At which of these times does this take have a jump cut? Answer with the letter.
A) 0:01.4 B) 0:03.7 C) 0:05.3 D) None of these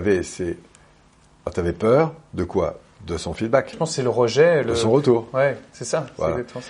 B